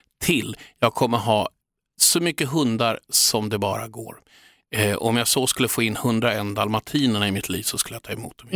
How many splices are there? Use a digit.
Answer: 0